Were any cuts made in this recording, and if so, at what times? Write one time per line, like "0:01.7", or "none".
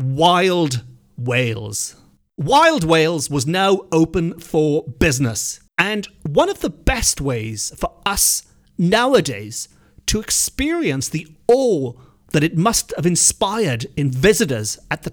0:05.7

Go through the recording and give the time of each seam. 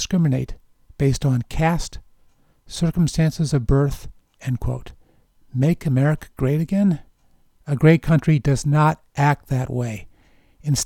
0:04.4
0:07.5

